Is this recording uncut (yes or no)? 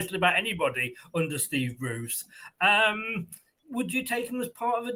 yes